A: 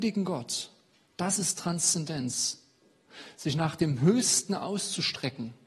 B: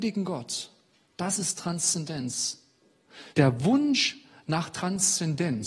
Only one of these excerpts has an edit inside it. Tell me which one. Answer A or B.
B